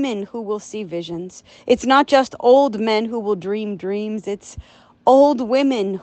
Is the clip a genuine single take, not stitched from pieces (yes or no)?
yes